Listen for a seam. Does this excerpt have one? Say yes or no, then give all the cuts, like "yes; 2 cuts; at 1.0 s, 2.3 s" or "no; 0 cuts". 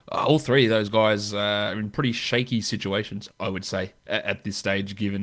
no; 0 cuts